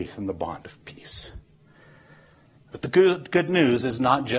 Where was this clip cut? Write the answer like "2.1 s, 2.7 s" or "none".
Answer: 2.6 s